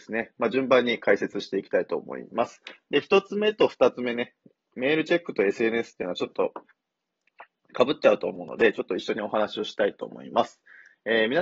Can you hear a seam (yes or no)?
no